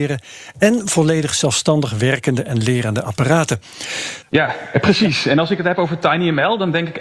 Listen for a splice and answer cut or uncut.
cut